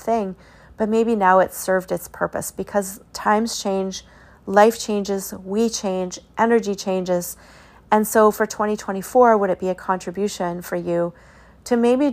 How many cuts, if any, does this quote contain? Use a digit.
1